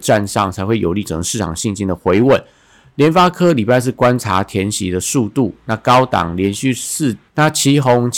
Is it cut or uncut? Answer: cut